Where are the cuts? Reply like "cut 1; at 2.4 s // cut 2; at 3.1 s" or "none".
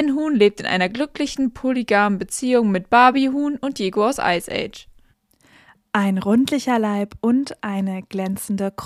none